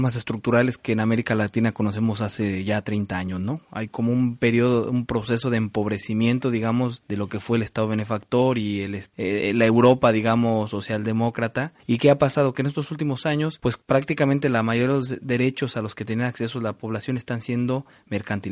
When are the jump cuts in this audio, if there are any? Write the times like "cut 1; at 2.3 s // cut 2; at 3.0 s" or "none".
none